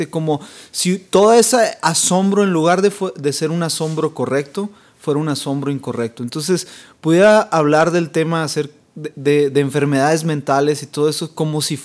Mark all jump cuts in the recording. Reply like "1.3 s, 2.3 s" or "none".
none

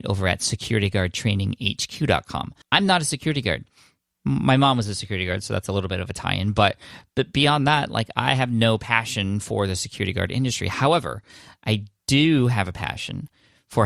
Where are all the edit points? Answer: 2.6 s

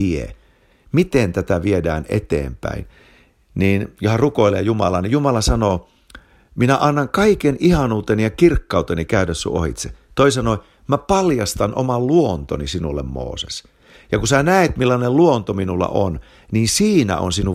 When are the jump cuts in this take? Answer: none

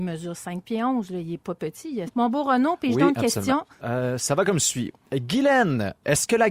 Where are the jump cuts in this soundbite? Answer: 2.1 s, 3.8 s

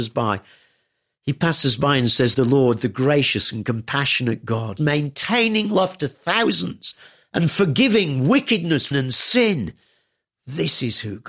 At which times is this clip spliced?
2.3 s, 4.8 s, 8.9 s

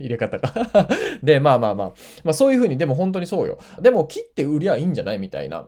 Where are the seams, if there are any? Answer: 3.8 s

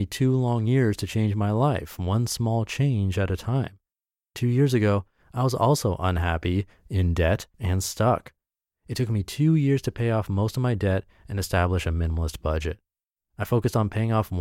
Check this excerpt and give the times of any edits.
7.5 s

